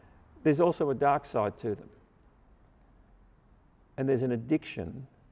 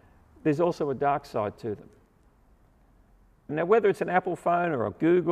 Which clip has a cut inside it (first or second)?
second